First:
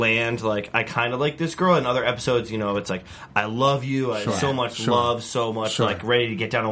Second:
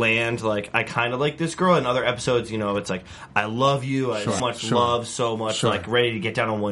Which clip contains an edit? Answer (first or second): second